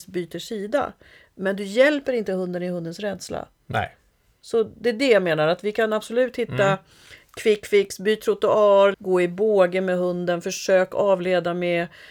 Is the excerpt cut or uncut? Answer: cut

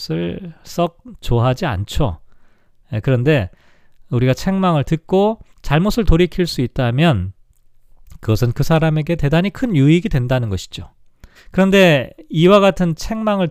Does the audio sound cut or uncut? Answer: cut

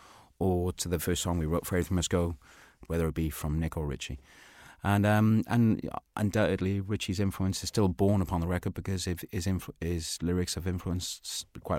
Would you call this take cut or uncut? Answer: cut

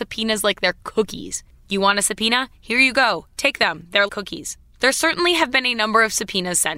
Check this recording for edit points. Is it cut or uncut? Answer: cut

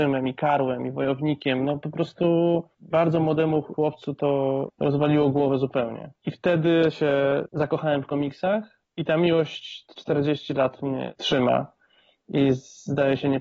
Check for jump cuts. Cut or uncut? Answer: uncut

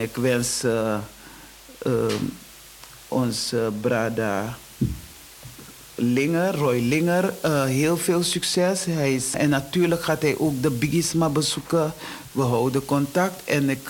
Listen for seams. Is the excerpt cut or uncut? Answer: cut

